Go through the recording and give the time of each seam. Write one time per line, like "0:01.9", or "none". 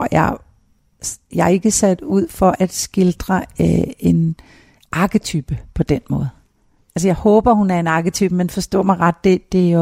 none